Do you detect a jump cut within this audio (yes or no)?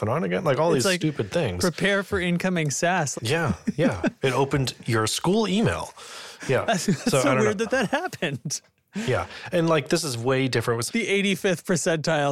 yes